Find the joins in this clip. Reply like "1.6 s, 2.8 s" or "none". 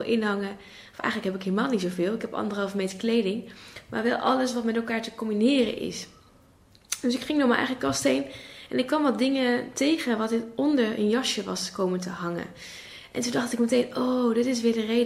none